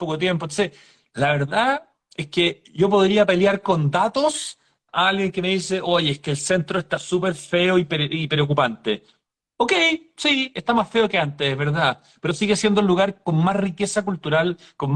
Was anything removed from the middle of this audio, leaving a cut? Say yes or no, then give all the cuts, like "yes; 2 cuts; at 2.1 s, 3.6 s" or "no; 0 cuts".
no; 0 cuts